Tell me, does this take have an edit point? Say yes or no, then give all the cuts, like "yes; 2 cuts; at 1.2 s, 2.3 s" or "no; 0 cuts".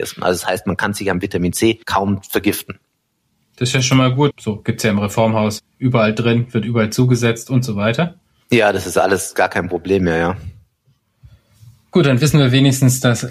yes; 3 cuts; at 1.8 s, 4.3 s, 5.6 s